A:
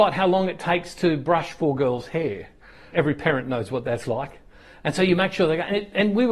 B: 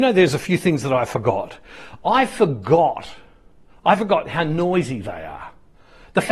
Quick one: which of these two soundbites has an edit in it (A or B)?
A